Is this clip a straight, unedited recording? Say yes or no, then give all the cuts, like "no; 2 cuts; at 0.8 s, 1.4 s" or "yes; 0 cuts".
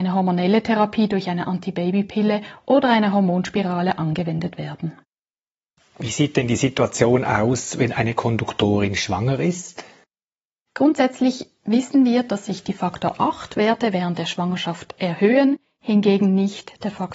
yes; 0 cuts